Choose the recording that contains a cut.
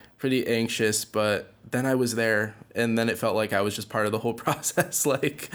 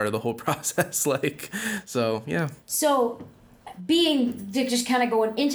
second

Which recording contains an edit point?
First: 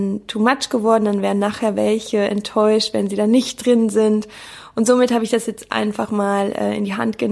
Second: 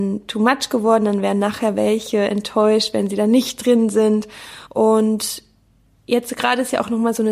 second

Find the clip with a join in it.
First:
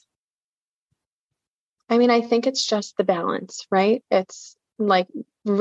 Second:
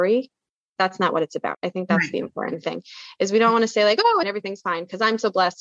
second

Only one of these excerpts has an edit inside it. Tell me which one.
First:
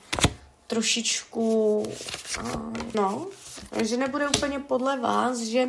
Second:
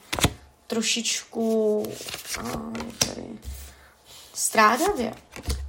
first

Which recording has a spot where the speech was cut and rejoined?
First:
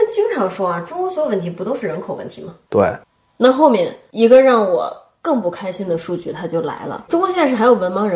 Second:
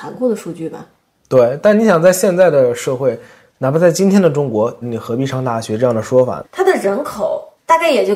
second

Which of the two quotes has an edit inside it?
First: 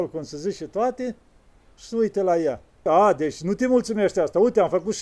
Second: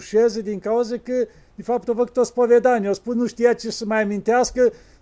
first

